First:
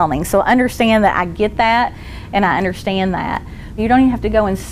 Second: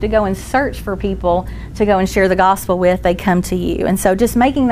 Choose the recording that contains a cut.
first; 1 cut; at 3.8 s

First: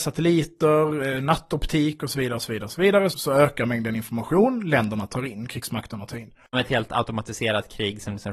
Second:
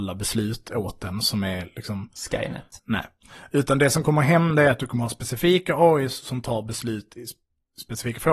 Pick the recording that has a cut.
first; 2 cuts; at 3.1 s, 6.5 s

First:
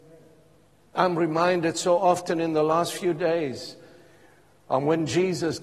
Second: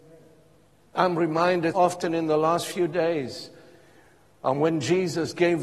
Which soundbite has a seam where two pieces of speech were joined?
second; 1 cut; at 1.7 s

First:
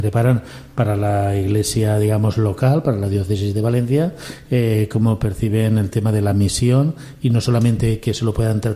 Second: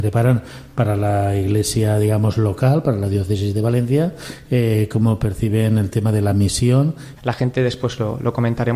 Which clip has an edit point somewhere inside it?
second; 1 cut; at 7.2 s

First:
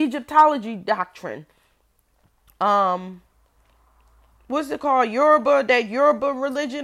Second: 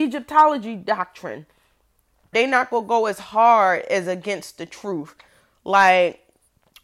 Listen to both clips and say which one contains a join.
second; 1 cut; at 2.3 s

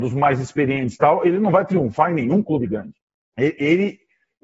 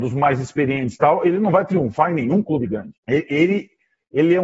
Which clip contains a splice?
second; 1 cut; at 3.0 s

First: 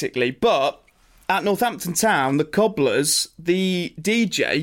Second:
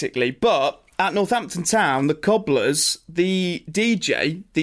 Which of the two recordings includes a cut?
second; 1 cut; at 0.9 s

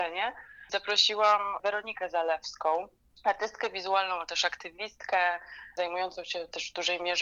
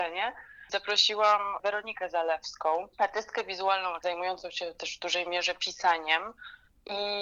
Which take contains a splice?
second; 2 cuts; at 2.9 s, 4.0 s

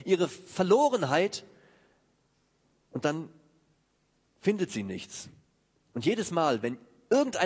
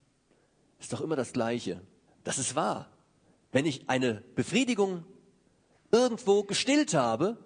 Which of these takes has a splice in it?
second; 1 cut; at 2.1 s

